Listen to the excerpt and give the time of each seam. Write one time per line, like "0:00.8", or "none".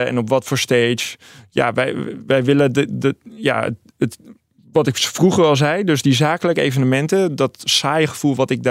none